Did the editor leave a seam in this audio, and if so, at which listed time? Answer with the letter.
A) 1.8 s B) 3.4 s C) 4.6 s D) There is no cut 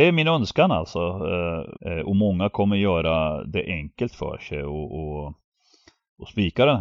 A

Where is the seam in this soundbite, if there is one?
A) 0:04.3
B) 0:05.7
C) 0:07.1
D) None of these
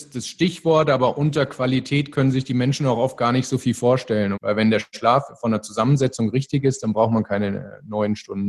A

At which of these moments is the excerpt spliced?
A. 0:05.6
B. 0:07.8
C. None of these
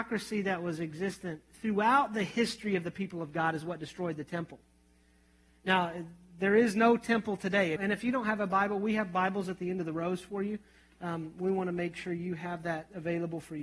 B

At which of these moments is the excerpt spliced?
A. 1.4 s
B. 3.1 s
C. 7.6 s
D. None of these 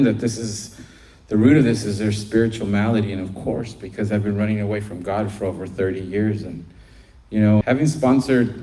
C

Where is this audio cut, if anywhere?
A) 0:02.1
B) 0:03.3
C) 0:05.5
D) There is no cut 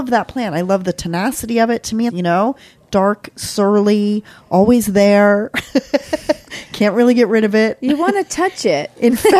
A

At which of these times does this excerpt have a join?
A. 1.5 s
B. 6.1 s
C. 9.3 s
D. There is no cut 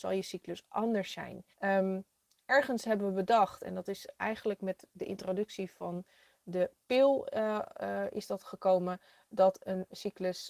A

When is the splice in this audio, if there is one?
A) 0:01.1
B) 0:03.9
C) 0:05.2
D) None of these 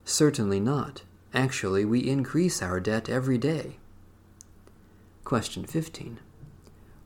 C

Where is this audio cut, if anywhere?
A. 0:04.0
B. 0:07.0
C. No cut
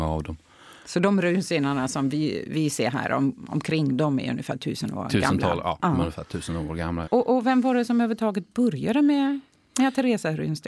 B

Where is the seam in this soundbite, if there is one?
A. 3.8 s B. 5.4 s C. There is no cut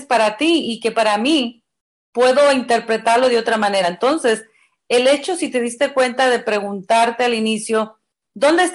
C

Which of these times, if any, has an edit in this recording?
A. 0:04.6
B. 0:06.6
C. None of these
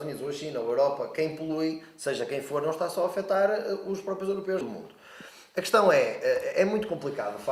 A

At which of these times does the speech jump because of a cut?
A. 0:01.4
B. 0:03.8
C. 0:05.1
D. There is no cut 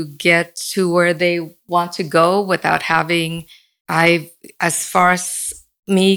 B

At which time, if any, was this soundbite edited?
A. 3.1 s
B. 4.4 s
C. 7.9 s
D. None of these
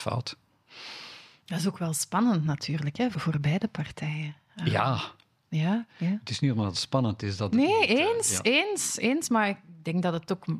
A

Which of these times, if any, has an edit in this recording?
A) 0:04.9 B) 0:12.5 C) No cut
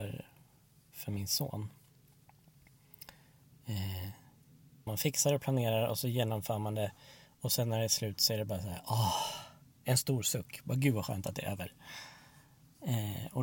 A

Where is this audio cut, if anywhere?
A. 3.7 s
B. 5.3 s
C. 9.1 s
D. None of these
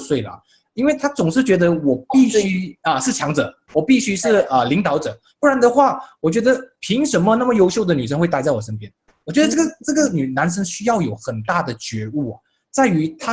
D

